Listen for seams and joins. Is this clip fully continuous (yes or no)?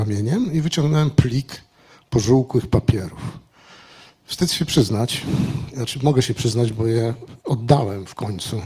yes